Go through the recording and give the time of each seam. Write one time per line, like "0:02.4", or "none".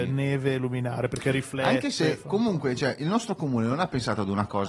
none